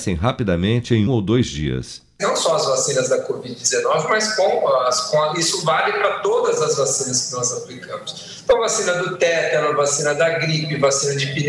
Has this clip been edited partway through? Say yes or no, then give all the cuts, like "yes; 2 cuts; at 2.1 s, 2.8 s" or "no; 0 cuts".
yes; 1 cut; at 1.1 s